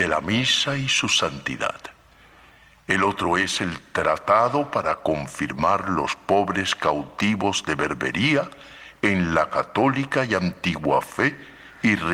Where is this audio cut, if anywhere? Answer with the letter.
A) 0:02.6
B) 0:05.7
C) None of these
C